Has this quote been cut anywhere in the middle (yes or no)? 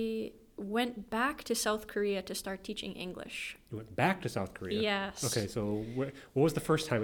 no